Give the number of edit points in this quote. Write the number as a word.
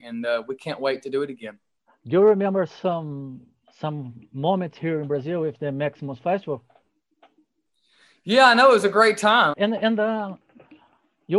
one